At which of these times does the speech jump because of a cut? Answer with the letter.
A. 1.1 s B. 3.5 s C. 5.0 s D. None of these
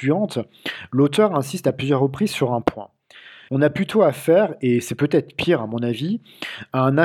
B